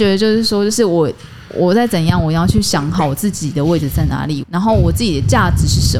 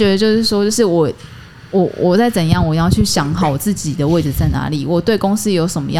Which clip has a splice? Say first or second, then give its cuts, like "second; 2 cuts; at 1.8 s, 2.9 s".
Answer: first; 2 cuts; at 1.5 s, 4.4 s